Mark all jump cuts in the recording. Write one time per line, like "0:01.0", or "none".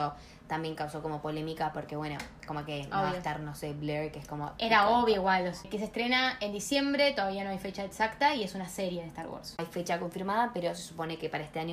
0:05.6
0:09.6